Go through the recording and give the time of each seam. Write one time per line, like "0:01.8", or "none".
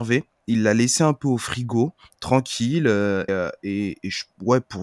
0:03.3

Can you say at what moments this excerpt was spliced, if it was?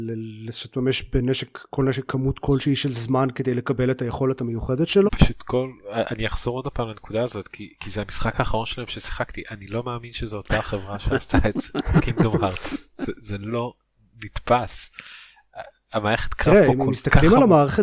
0:05.1

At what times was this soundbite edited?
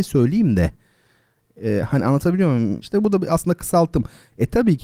0:02.8

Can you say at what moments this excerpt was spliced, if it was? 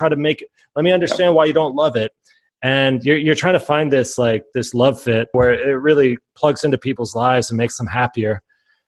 0:05.3

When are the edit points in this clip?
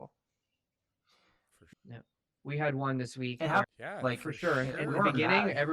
0:01.7
0:03.6

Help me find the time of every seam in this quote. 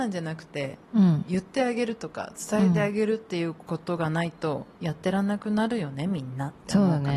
0:04.7

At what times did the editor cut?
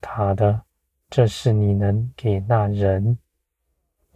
0:01.0

